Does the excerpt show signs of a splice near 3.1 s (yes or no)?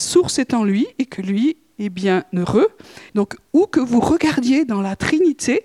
yes